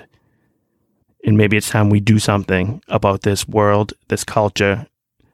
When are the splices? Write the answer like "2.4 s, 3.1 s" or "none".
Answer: 1.0 s